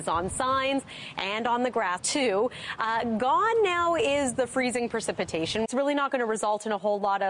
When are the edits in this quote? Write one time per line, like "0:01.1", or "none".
0:02.0
0:05.6